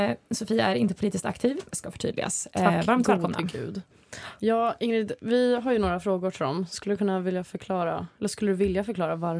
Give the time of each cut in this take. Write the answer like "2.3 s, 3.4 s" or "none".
1.7 s